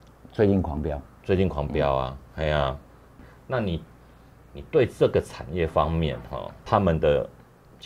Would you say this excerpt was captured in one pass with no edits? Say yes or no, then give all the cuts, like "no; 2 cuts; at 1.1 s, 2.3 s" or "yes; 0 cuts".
yes; 0 cuts